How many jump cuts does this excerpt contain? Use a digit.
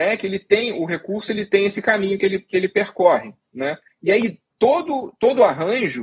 0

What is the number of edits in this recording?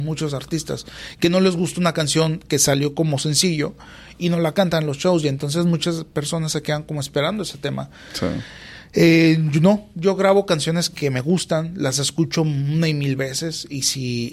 0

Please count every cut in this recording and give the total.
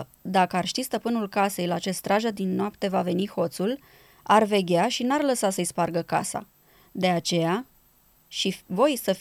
0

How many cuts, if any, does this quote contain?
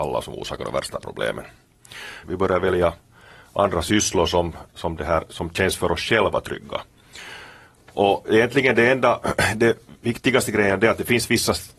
1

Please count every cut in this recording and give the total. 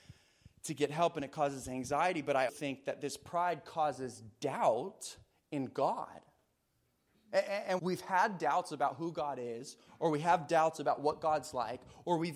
2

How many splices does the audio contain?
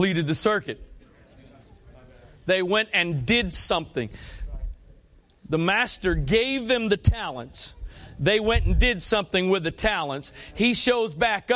0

